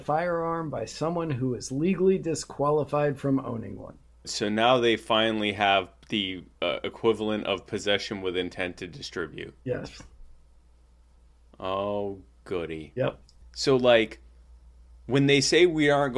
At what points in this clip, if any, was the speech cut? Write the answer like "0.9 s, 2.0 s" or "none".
4.2 s, 13.4 s